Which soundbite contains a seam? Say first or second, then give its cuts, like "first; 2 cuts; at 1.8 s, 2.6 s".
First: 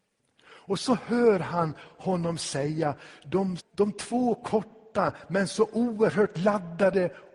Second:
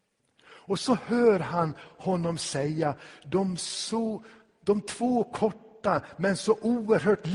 first; 1 cut; at 3.6 s